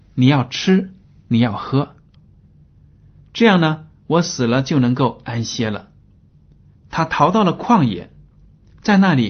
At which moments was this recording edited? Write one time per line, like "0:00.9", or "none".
0:02.1
0:06.7